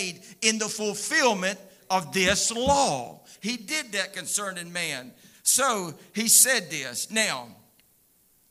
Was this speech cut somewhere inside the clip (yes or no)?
yes